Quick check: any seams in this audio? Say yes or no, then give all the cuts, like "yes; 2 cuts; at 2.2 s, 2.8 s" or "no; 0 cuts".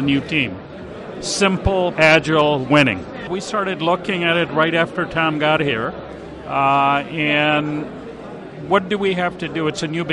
yes; 1 cut; at 1.9 s